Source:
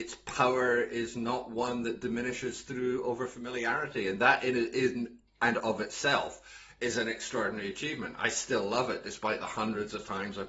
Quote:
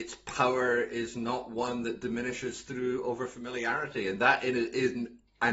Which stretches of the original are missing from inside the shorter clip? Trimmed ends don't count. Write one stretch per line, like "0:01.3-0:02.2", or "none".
none